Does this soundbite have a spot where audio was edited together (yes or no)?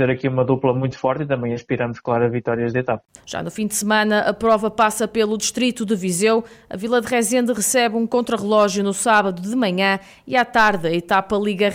yes